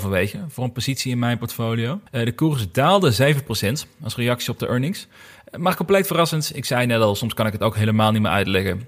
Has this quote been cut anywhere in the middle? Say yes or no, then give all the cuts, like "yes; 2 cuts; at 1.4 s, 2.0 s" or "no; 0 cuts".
yes; 1 cut; at 2.1 s